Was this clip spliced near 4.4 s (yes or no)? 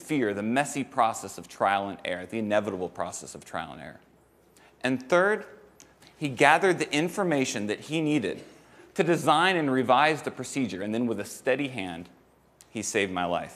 no